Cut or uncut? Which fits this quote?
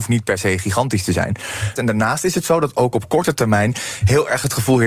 cut